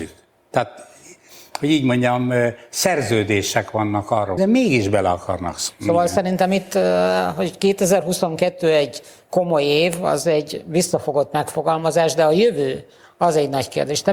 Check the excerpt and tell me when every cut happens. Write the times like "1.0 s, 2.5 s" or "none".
4.4 s, 5.7 s